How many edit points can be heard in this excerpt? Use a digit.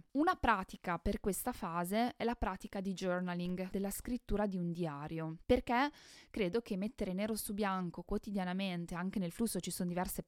1